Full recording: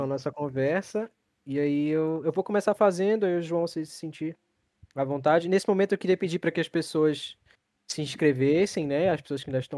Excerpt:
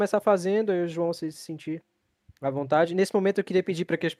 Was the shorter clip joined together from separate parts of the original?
no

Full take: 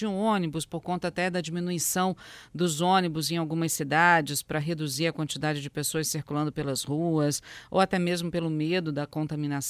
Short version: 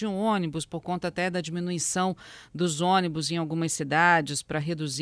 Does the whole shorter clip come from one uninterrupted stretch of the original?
yes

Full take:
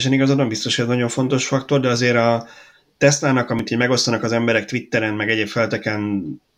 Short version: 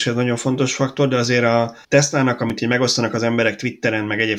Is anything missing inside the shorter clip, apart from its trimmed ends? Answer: yes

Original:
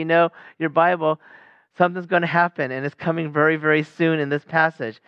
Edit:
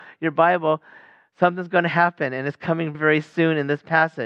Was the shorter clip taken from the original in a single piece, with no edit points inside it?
no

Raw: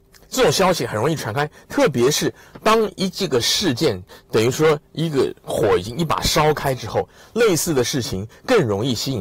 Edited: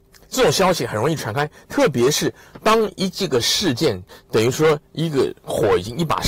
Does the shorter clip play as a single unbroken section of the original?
yes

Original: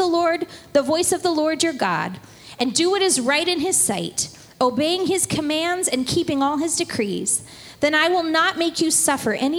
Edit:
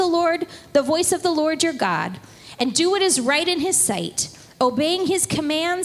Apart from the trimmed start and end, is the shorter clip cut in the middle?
no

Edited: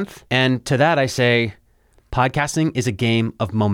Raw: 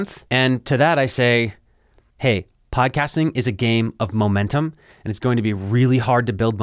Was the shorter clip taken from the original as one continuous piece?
no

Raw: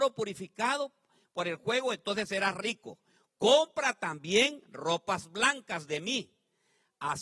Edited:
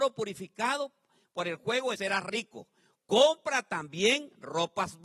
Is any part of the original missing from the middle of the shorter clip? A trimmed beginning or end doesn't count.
yes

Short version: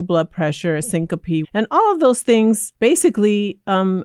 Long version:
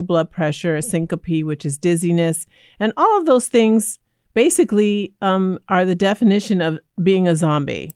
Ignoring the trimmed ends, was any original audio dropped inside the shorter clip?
yes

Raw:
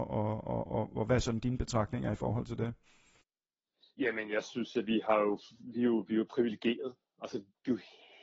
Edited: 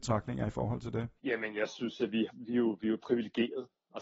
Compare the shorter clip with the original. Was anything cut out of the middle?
yes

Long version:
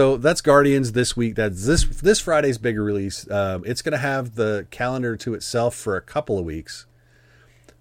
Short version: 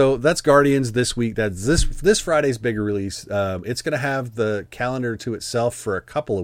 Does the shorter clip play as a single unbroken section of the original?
yes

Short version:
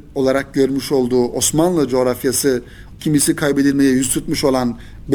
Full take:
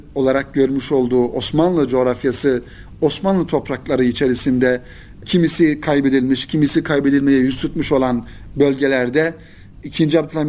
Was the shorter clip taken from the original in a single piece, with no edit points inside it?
no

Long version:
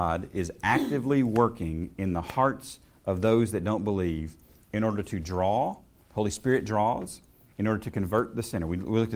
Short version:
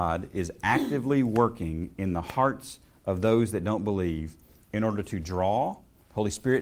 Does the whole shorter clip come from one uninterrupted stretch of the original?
yes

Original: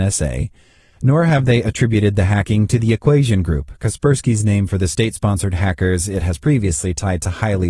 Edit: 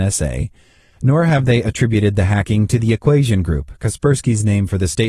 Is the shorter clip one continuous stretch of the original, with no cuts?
yes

